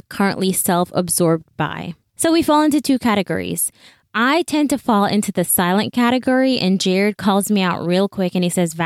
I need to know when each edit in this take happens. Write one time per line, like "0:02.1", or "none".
none